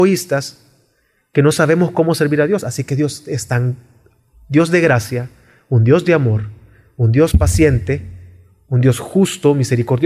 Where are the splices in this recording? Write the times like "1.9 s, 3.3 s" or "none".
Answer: none